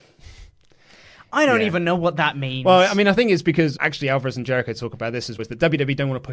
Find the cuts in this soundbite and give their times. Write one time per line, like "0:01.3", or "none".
0:03.8
0:05.4